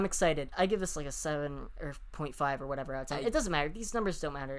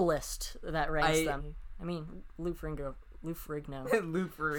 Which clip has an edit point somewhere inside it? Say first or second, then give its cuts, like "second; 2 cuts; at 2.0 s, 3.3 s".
second; 1 cut; at 1.4 s